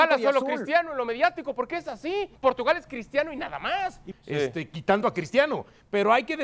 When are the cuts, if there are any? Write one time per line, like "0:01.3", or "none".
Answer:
0:02.4
0:04.1